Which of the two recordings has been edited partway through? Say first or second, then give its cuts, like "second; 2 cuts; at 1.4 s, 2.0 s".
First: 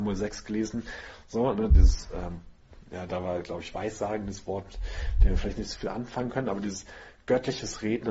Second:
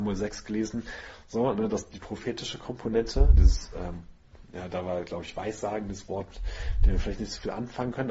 first; 1 cut; at 1.7 s